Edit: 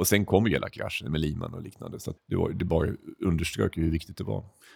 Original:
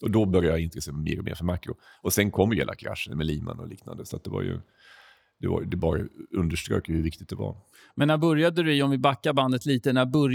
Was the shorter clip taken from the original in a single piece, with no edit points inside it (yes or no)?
no